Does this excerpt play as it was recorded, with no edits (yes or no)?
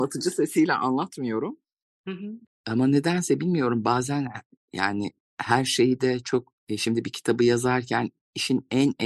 no